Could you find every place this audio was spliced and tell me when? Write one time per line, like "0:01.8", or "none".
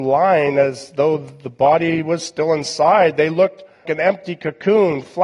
0:03.8

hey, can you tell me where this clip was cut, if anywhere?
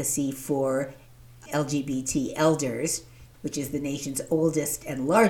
0:01.5
0:03.3

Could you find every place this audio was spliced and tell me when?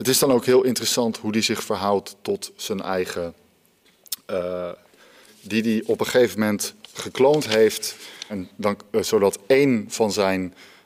0:05.3
0:06.8
0:08.3

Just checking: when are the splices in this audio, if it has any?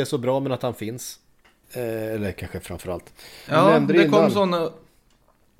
0:01.6
0:03.5

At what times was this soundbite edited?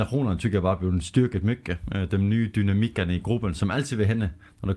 none

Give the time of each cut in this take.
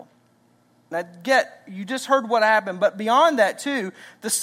0:00.9

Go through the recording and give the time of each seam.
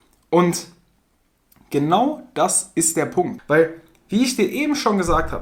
0:03.4

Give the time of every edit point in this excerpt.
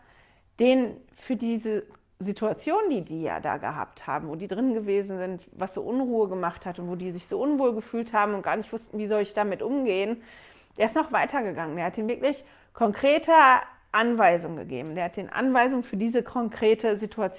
none

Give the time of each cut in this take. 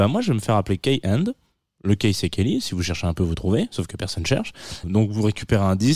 0:04.8

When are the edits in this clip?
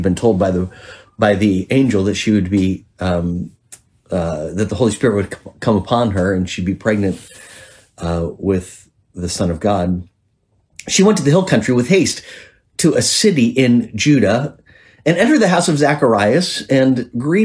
none

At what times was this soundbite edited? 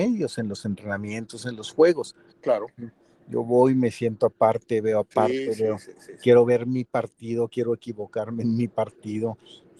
0:02.3

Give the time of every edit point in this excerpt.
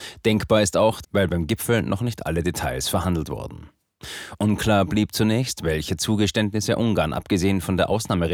0:01.0

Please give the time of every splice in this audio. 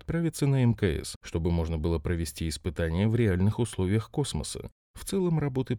none

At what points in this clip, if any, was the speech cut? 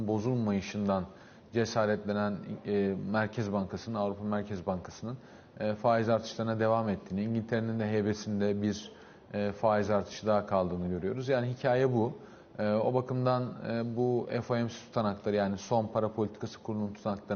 none

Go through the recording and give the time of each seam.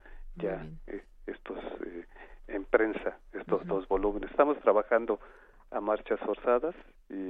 0:02.4

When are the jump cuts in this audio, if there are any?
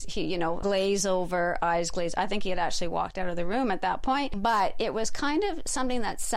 none

